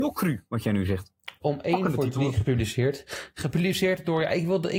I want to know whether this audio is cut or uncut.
cut